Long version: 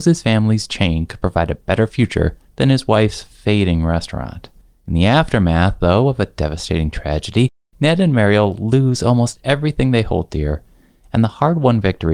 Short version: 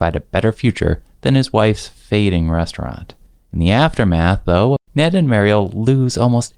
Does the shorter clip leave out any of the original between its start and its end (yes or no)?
yes